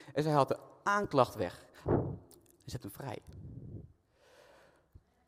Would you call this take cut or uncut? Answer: cut